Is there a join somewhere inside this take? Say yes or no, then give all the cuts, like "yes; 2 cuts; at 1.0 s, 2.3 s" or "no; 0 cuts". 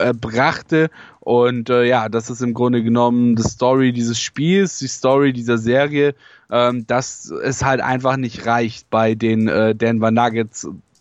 no; 0 cuts